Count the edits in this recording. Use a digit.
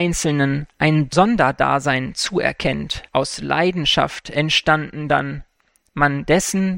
1